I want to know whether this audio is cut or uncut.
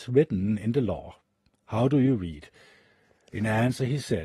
uncut